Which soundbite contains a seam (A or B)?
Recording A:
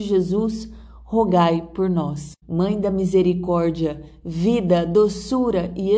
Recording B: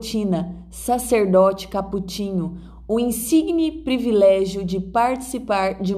A